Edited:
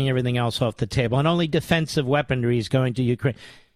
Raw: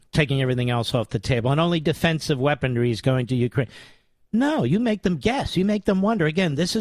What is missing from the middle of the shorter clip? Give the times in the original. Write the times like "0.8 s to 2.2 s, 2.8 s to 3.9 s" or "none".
none

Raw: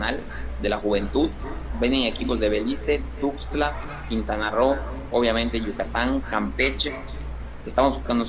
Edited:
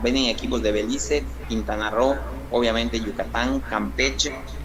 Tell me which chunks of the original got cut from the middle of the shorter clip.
3.2 s to 4.0 s

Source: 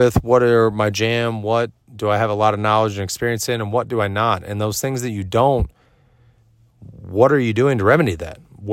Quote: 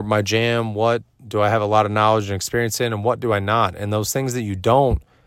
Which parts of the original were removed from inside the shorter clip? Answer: none

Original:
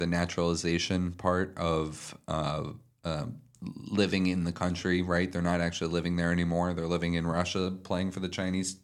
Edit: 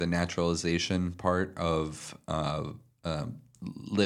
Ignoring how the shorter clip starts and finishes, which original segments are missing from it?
none

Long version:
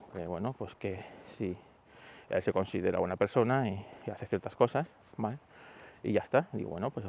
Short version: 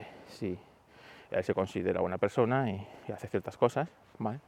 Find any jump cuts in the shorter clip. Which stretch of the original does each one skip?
none

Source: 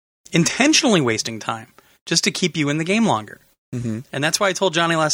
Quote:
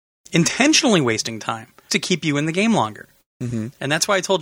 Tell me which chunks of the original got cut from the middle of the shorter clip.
1.9 s to 2.2 s

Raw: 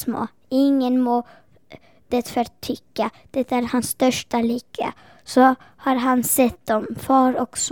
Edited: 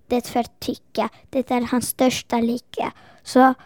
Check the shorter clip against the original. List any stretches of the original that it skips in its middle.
none

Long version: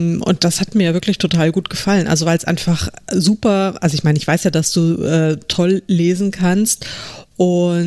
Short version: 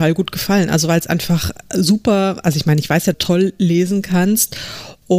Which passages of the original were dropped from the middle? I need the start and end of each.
4.5 s to 5.4 s

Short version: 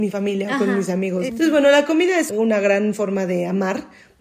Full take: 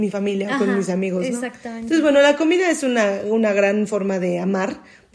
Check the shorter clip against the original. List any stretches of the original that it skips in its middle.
1.3 s to 1.8 s, 2.8 s to 3.2 s

